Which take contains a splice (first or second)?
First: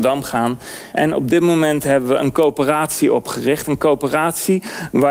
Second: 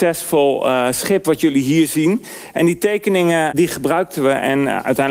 first